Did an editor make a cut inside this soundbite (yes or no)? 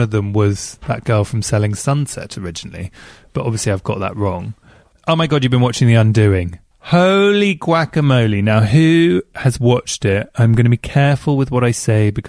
no